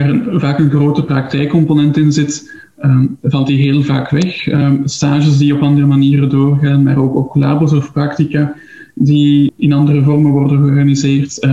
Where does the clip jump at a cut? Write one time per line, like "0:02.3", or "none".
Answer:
0:09.5